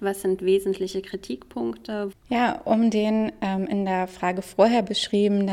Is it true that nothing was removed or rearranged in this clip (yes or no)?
no